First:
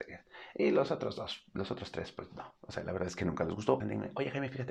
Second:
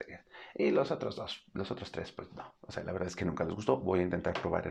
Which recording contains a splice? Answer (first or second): first